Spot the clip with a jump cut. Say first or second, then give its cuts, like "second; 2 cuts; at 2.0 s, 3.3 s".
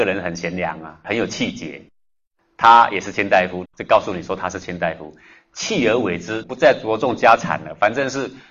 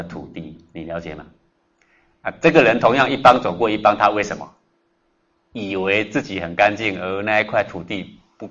first; 2 cuts; at 3.7 s, 6.4 s